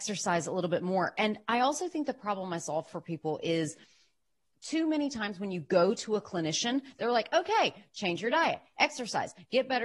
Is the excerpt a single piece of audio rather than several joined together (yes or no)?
yes